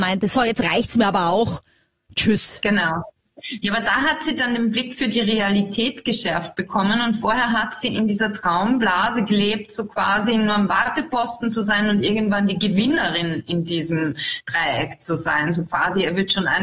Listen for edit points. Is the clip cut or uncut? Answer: uncut